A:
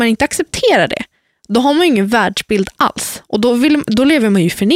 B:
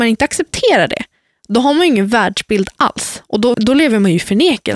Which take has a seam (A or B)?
B